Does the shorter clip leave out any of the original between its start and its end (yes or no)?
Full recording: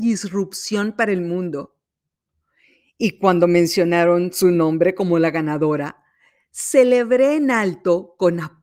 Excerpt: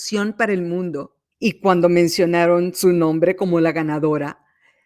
yes